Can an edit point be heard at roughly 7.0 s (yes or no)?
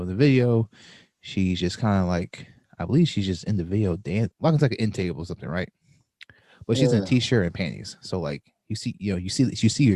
no